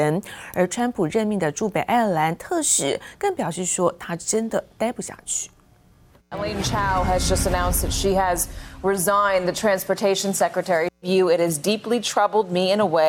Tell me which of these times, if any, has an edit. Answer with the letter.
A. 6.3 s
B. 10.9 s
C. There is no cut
C